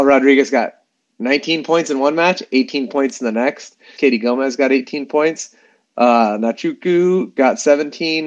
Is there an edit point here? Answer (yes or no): yes